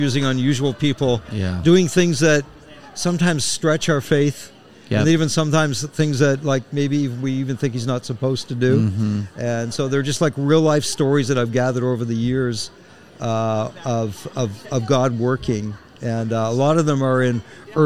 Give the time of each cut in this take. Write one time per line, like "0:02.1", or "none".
none